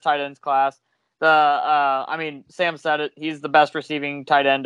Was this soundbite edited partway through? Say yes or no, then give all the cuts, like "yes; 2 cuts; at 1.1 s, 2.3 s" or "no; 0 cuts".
no; 0 cuts